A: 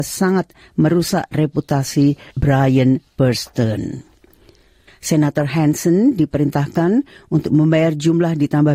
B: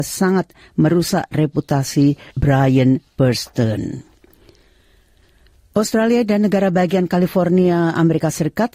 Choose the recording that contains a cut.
A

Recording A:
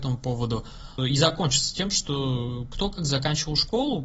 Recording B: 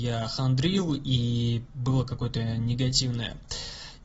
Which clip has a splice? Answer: A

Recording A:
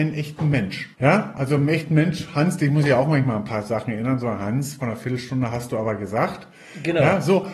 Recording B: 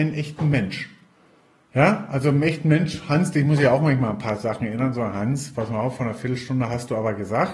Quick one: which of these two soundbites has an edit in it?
A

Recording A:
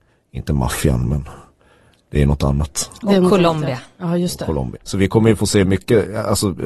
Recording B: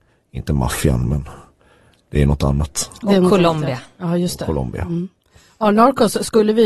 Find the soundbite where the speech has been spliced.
A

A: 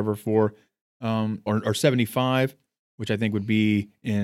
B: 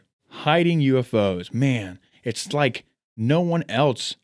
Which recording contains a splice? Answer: A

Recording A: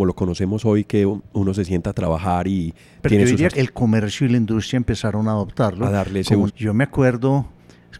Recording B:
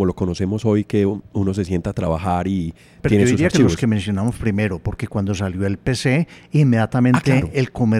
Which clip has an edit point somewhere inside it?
A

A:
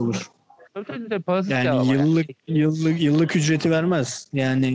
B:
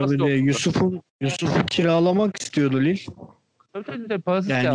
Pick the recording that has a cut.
B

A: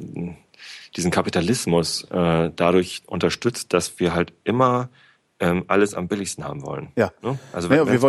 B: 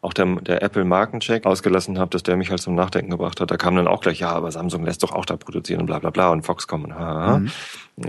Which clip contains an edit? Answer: B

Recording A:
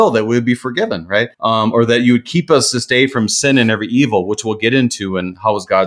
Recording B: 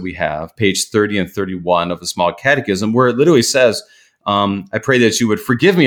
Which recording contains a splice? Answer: A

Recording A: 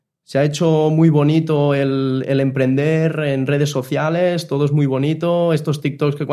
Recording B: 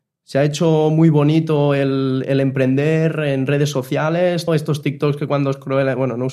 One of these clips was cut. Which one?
B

